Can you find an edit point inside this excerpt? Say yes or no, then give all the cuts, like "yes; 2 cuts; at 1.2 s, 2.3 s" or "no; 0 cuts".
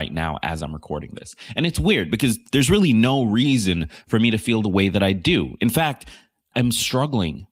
no; 0 cuts